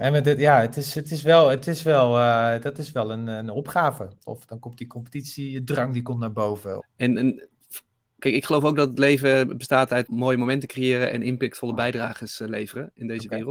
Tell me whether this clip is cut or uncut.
cut